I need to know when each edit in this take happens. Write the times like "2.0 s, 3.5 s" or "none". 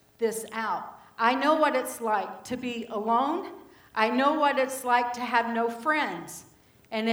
none